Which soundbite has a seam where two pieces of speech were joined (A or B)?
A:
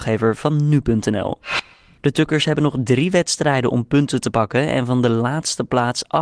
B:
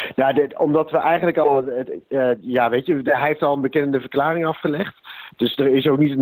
A